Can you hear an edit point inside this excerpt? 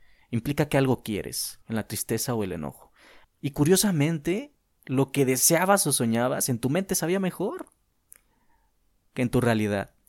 yes; 2 cuts; at 1.6 s, 3.2 s

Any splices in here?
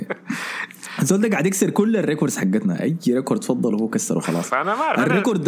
no; 0 cuts

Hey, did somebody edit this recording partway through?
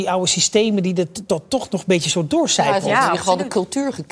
yes; 1 cut; at 1.3 s

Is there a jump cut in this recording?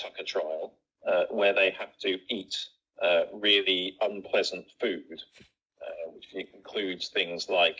no; 0 cuts

